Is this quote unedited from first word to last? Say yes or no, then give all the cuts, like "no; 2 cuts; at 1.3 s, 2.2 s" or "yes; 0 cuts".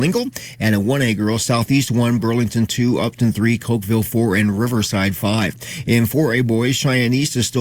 yes; 0 cuts